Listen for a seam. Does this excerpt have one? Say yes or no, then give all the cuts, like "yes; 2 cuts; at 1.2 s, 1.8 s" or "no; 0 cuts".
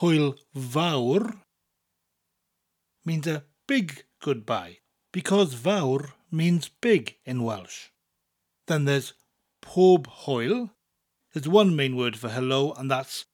yes; 1 cut; at 11.2 s